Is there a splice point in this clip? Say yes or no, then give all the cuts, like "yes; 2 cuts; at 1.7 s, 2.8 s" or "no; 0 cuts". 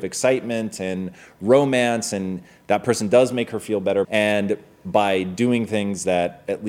yes; 1 cut; at 4.0 s